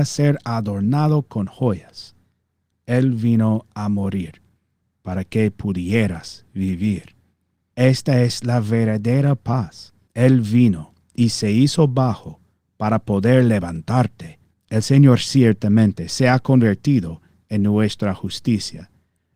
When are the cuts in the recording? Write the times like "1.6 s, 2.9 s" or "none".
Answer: 7.7 s, 10.1 s, 14.5 s